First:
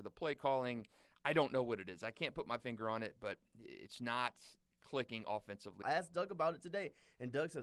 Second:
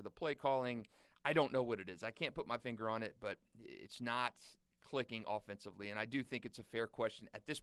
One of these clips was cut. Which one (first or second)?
first